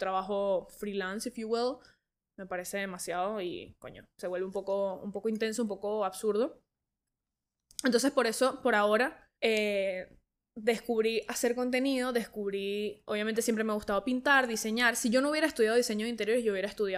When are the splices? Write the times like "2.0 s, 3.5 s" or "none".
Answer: 9.4 s